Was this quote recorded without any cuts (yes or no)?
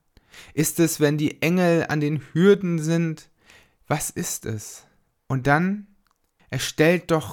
yes